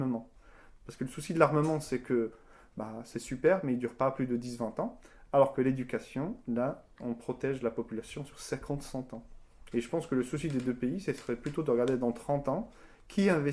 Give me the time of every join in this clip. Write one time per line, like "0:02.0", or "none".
0:09.7